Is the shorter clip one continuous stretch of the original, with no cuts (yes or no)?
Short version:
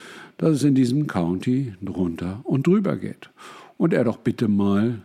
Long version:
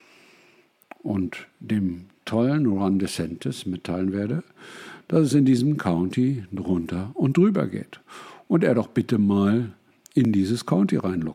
yes